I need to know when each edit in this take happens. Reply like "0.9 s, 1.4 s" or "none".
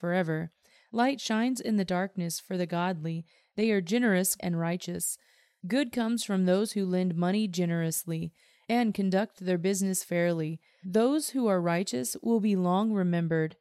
4.4 s, 10.8 s